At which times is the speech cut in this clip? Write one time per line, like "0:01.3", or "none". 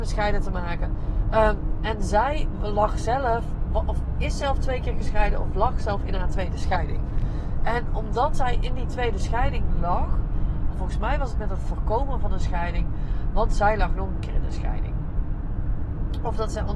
0:10.7